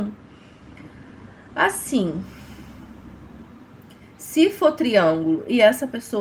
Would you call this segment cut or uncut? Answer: uncut